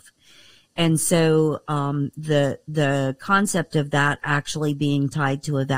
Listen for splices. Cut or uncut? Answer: uncut